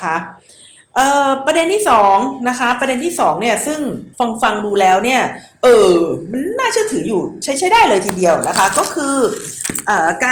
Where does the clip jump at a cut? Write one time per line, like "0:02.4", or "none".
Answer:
0:04.1